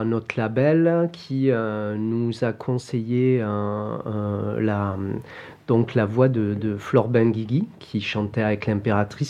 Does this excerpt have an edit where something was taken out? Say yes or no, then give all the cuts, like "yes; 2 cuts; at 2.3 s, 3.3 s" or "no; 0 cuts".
no; 0 cuts